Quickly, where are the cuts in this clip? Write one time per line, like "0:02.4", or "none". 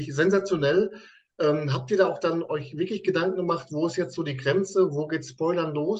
none